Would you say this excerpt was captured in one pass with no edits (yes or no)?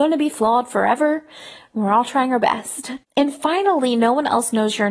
yes